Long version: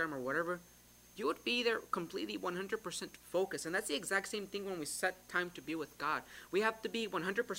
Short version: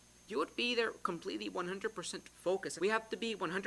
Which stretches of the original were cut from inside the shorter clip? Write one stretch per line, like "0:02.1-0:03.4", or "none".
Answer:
0:03.6-0:06.5